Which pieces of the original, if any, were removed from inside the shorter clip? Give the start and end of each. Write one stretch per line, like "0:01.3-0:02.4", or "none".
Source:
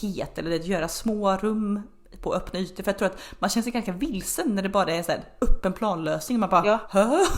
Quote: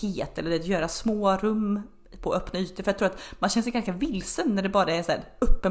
none